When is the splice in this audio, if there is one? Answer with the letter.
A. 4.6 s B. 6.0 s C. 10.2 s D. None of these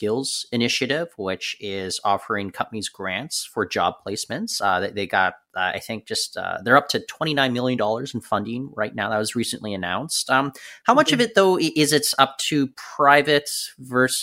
D